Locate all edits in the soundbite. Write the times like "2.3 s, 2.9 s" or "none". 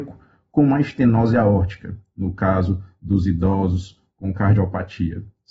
none